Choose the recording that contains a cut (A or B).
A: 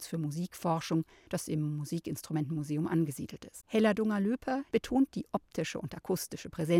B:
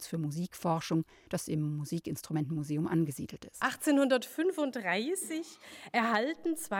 A